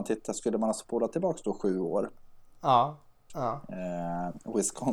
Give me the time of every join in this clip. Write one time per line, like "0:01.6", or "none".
0:03.3